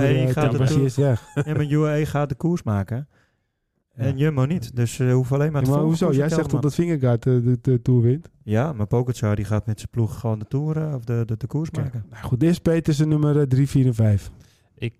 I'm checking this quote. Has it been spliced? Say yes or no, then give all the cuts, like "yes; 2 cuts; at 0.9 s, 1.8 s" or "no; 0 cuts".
yes; 1 cut; at 10.1 s